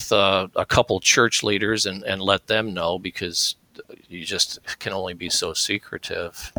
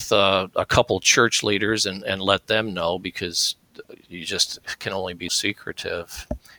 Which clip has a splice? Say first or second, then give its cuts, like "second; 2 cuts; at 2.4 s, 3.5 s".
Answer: second; 1 cut; at 5.3 s